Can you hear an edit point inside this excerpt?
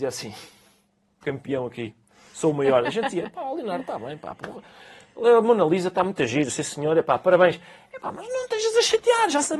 no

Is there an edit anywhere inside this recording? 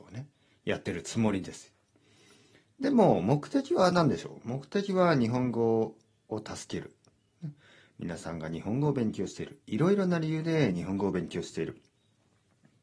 no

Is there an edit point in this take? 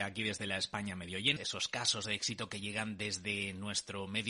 yes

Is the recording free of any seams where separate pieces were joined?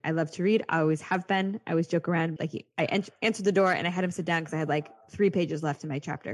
no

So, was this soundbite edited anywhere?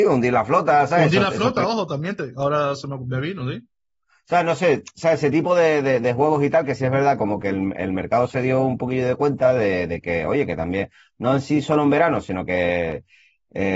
no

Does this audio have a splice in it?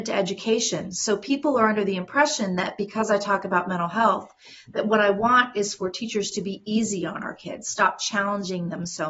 no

